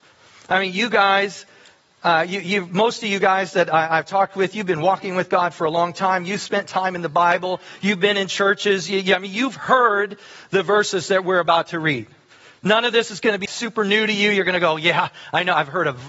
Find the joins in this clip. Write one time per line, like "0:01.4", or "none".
0:13.5